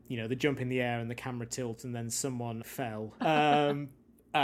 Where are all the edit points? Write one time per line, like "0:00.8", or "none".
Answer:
0:03.2